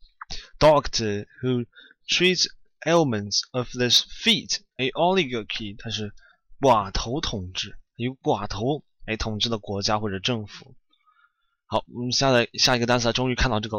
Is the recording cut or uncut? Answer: cut